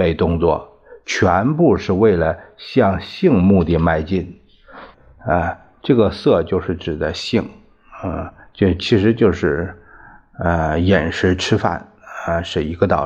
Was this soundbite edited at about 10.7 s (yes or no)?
no